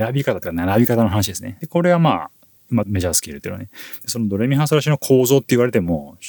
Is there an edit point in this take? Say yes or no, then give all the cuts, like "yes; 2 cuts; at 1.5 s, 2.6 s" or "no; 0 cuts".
yes; 2 cuts; at 1.6 s, 2.8 s